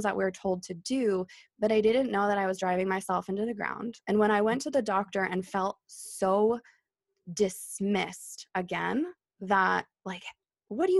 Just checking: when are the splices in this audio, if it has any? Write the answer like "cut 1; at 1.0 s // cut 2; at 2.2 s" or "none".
cut 1; at 4.0 s